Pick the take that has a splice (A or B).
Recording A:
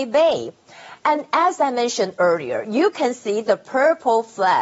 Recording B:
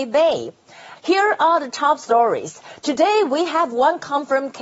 B